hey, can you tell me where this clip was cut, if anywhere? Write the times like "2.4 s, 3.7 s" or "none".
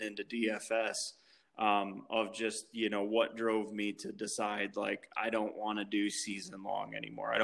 none